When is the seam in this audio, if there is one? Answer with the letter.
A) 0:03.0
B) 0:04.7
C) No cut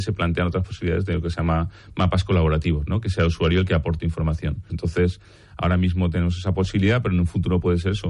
B